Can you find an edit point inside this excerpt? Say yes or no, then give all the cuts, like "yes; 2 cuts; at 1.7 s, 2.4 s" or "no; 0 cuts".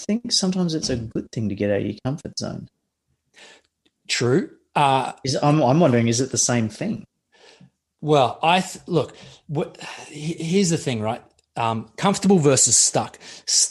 no; 0 cuts